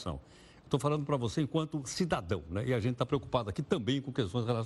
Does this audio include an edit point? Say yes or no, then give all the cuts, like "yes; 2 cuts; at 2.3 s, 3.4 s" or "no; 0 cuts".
no; 0 cuts